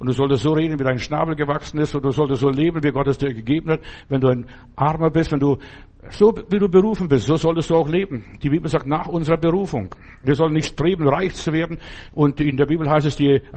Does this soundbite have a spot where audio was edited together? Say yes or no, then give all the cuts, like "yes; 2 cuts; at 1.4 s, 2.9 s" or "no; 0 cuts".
no; 0 cuts